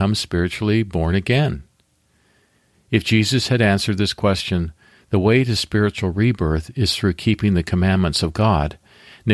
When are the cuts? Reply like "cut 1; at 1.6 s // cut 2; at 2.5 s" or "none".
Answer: none